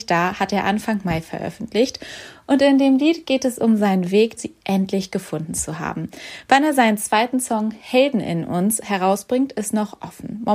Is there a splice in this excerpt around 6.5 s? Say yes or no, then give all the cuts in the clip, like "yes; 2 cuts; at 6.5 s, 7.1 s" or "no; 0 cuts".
no; 1 cut; at 4.4 s